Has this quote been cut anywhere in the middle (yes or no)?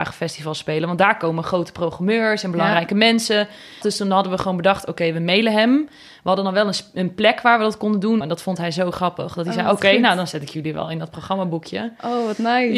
yes